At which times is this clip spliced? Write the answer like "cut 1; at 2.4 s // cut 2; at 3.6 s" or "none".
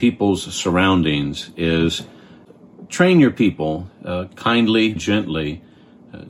cut 1; at 5.0 s